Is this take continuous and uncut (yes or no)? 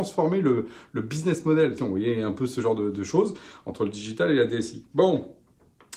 no